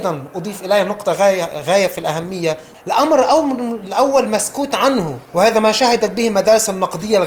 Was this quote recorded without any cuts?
no; 2 cuts; at 2.7 s, 5.2 s

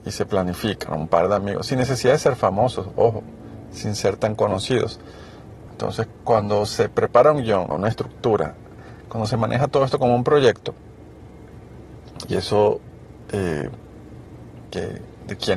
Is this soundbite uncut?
no; 3 cuts; at 5.7 s, 7.7 s, 14.7 s

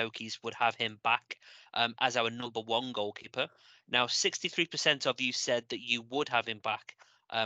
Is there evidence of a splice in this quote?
no; 0 cuts

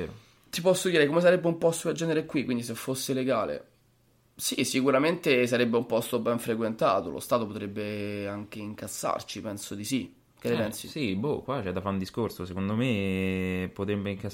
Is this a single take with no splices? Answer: yes; 0 cuts

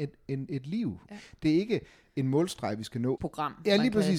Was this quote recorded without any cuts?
no; 2 cuts; at 1.1 s, 3.2 s

